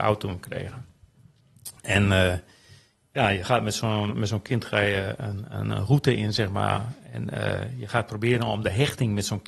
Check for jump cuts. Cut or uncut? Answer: uncut